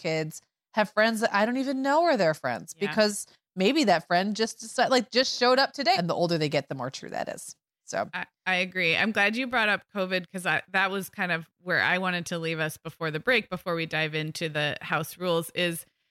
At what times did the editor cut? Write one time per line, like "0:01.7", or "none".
0:05.9